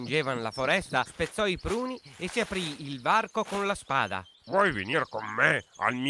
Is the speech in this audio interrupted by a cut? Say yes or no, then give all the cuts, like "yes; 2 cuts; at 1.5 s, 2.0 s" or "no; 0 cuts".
yes; 2 cuts; at 1.1 s, 4.4 s